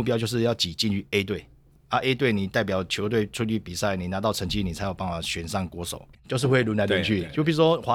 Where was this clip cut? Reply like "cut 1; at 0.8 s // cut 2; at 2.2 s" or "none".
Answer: cut 1; at 1.8 s // cut 2; at 6.1 s